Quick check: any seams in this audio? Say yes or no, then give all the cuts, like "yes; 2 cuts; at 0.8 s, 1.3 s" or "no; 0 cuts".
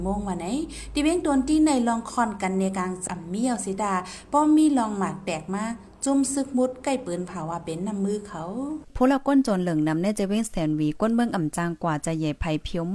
yes; 1 cut; at 3.1 s